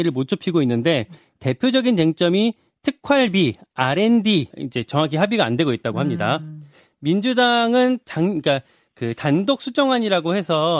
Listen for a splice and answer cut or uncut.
cut